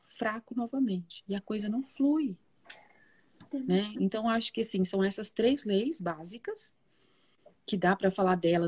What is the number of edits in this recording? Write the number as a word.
zero